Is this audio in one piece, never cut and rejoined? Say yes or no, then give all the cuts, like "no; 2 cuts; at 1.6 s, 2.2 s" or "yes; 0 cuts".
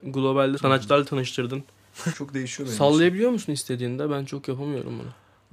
no; 1 cut; at 2.1 s